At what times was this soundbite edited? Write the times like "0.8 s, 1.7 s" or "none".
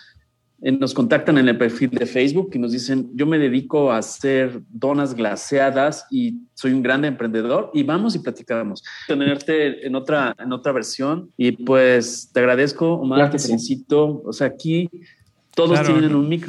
9.1 s, 11.3 s, 14.2 s